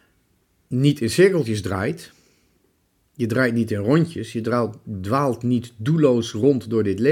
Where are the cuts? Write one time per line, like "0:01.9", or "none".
none

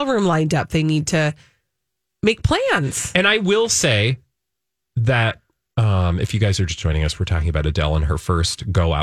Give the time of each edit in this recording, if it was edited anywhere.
none

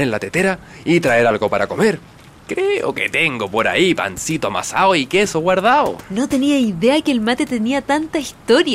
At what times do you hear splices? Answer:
none

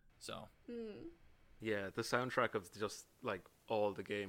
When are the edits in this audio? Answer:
none

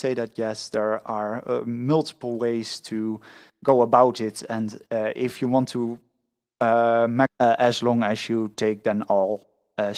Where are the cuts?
0:07.3

